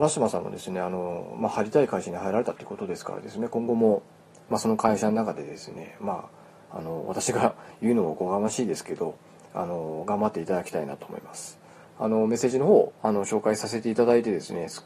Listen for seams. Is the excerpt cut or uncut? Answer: cut